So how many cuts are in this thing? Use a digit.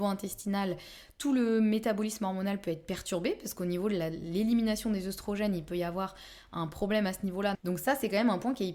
1